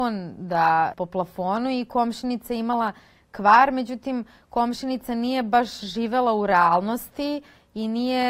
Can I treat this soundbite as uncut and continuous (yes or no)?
no